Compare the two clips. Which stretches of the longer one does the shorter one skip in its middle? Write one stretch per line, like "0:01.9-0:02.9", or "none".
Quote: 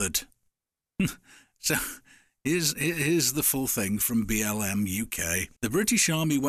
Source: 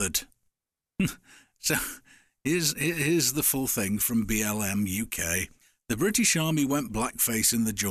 0:05.6-0:05.8